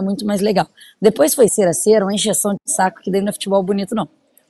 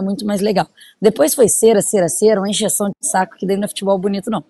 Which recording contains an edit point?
first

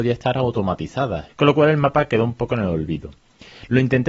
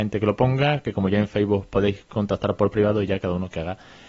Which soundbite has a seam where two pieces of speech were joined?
first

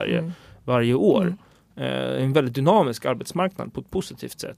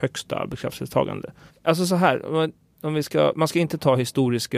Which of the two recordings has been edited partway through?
second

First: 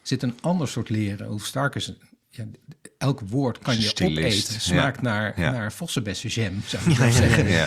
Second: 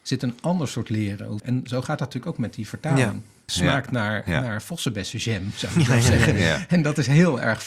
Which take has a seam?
second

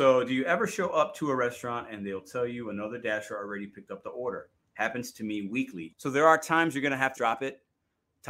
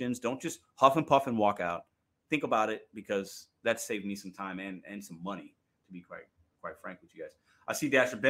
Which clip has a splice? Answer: first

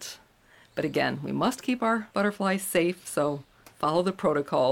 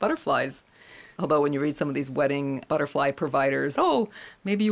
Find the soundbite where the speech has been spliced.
second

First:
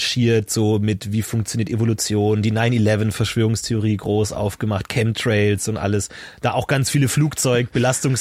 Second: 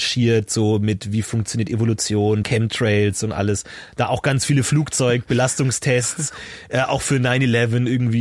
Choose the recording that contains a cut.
second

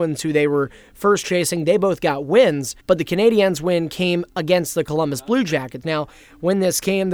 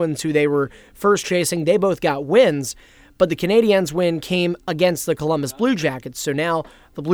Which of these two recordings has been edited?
first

